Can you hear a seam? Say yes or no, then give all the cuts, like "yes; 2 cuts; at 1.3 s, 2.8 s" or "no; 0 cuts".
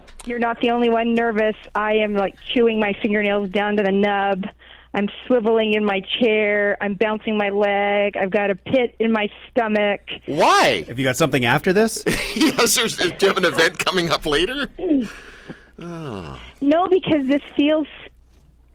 no; 0 cuts